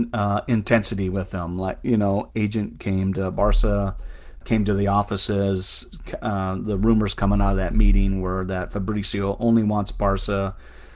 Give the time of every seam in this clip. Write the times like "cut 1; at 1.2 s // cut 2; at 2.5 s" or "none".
cut 1; at 2.3 s // cut 2; at 4.4 s